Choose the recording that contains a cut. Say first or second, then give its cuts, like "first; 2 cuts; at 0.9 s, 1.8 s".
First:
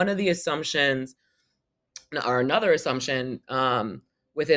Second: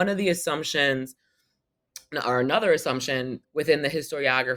second; 1 cut; at 3.4 s